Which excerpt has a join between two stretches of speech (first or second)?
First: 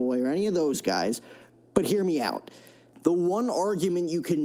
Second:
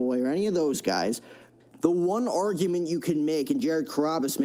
second